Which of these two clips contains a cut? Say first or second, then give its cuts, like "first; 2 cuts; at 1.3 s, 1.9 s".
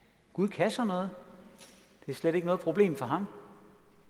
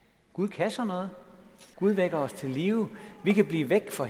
second; 1 cut; at 1.7 s